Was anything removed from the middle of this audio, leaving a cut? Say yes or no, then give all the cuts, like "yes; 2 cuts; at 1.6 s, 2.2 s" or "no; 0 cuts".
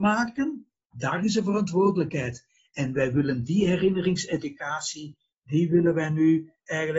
yes; 1 cut; at 0.9 s